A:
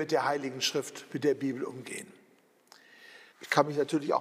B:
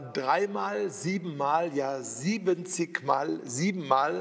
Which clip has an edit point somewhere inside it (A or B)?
A